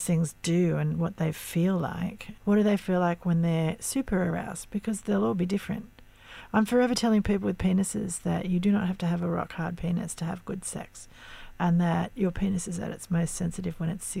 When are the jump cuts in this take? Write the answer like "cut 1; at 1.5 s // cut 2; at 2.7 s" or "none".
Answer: cut 1; at 2.4 s